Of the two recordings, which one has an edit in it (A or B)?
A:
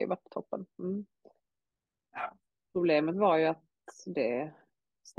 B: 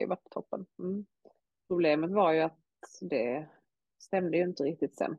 B